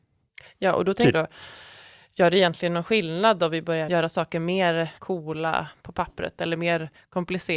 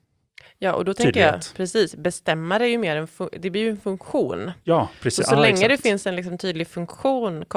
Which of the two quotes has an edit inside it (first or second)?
first